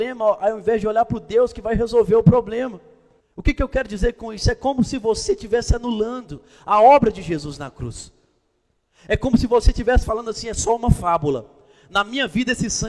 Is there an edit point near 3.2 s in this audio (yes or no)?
yes